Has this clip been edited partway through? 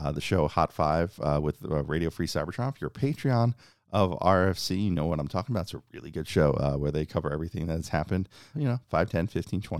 yes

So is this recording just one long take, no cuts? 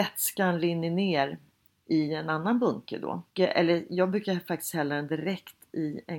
yes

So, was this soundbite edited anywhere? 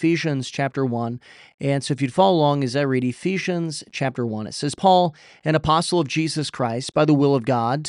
no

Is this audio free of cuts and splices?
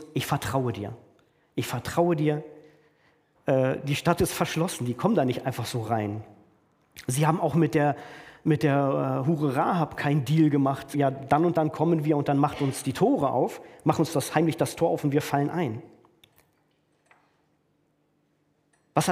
no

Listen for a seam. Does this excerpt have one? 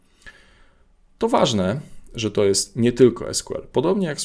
no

